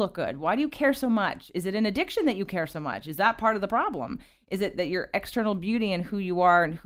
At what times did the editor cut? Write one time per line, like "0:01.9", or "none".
none

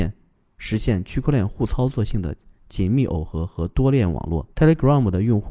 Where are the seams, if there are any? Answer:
0:04.5

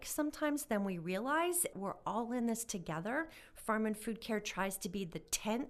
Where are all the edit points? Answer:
0:01.7

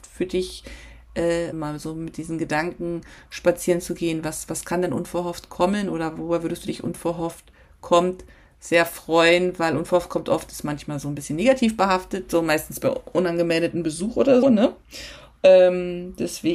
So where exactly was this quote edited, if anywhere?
0:01.5
0:14.4

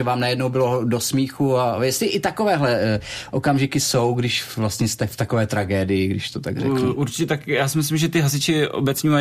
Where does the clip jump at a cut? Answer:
none

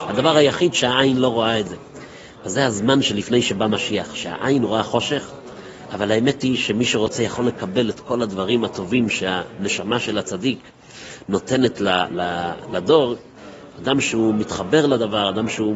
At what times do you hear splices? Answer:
none

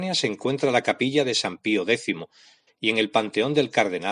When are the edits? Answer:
0:02.7

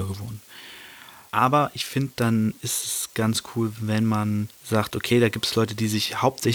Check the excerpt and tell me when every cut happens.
0:01.3
0:04.5

